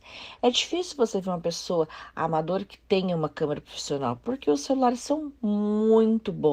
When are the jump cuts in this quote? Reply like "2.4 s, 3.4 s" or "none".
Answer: none